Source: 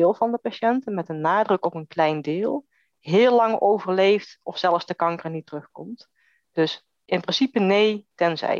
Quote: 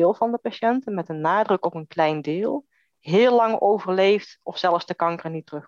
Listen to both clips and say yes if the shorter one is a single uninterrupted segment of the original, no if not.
yes